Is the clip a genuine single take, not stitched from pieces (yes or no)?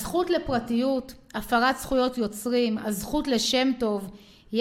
yes